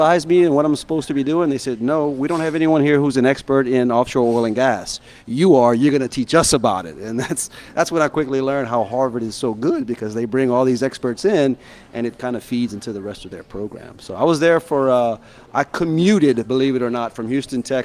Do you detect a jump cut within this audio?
no; 0 cuts

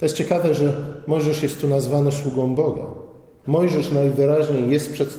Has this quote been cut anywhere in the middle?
yes; 1 cut; at 3.4 s

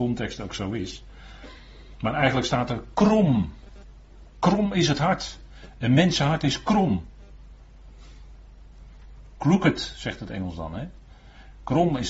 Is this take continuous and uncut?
yes; 0 cuts

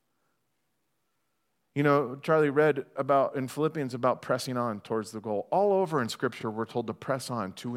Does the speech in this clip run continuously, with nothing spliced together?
yes; 0 cuts

